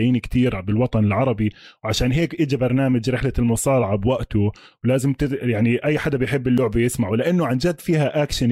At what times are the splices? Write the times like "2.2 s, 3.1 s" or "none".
none